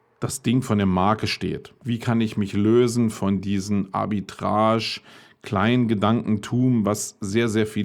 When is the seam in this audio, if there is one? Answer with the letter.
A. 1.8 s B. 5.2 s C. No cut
A